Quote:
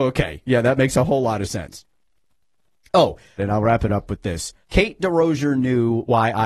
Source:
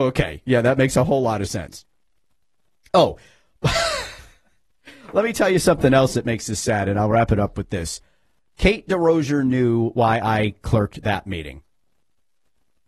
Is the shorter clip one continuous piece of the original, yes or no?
no